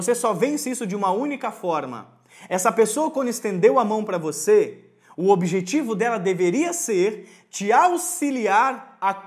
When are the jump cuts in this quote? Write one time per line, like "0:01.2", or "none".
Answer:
none